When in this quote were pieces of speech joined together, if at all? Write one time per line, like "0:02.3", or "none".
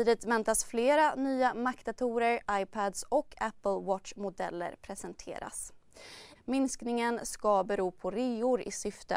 0:06.3

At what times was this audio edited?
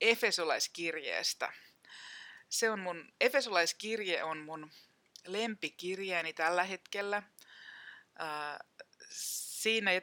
none

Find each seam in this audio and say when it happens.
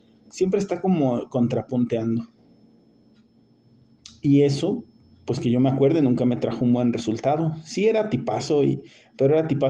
none

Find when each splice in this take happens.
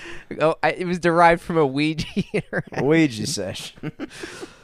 none

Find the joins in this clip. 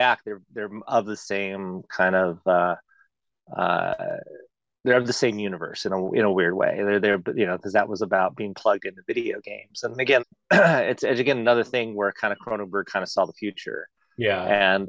0:10.2

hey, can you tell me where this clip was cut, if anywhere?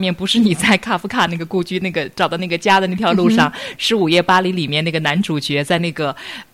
none

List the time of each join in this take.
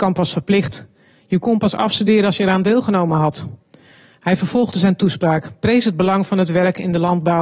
none

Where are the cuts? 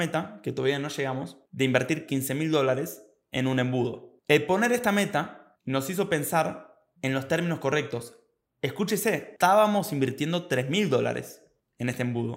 none

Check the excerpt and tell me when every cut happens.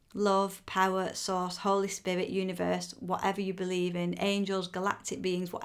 none

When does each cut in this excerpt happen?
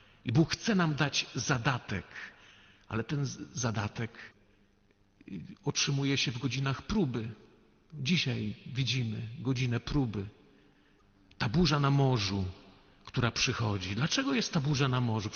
none

